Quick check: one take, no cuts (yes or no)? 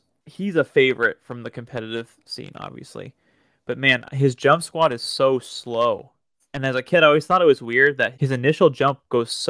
no